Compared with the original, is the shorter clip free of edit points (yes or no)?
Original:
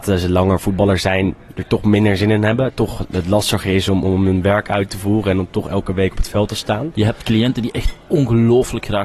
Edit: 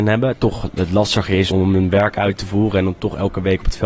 no